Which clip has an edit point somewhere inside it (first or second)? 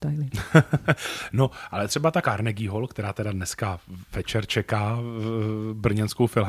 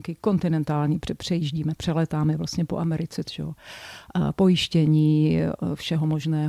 second